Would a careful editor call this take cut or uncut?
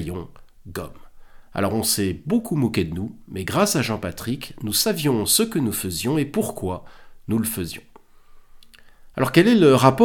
uncut